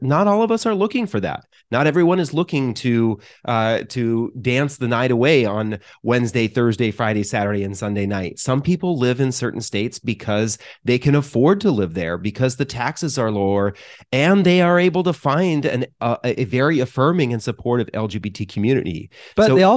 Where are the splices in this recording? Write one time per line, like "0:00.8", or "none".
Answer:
none